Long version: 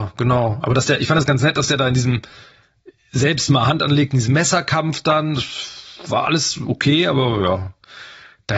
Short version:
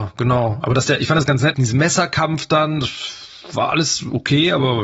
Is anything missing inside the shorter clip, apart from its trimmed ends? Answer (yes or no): yes